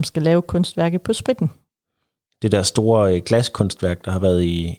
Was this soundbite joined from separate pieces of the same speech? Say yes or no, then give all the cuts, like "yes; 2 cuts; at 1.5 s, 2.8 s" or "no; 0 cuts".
no; 0 cuts